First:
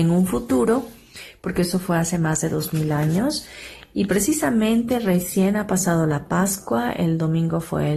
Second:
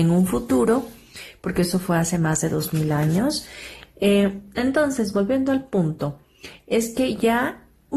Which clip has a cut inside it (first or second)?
second